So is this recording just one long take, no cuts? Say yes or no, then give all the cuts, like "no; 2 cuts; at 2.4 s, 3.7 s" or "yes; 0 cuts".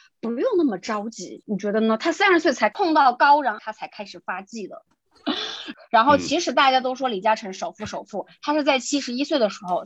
no; 1 cut; at 4.9 s